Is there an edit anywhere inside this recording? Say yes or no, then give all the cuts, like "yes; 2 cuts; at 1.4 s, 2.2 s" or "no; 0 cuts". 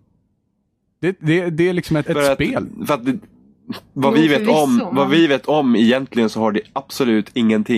yes; 1 cut; at 2.1 s